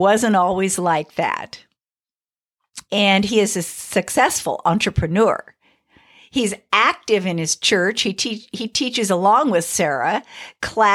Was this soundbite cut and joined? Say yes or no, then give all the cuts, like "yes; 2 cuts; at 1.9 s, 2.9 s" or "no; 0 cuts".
yes; 1 cut; at 2.8 s